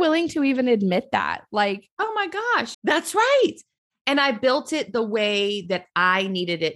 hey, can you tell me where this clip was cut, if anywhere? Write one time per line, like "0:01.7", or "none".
0:02.7